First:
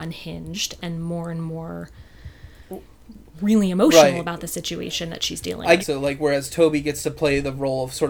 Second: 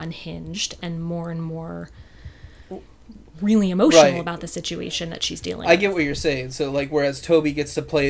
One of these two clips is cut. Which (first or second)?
first